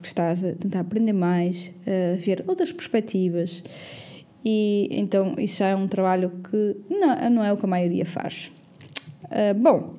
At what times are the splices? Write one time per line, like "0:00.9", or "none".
none